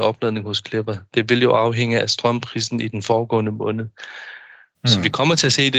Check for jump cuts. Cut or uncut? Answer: cut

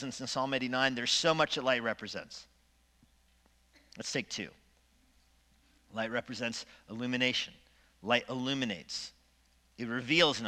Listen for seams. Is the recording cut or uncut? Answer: uncut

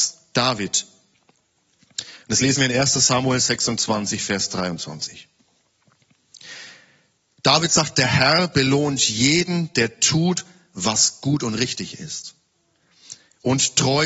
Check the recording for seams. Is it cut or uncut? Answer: uncut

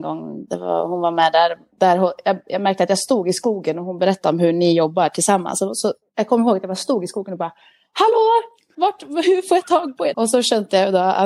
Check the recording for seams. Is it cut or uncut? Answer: cut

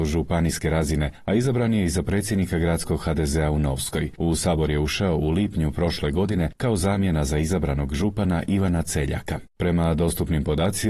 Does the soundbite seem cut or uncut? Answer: cut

